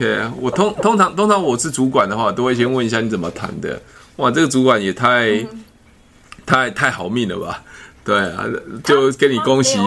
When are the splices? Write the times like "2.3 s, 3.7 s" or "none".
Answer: none